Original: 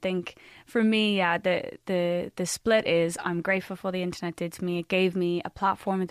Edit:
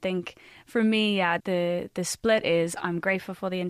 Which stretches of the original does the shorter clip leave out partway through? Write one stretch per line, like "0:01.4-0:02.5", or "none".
0:01.4-0:01.8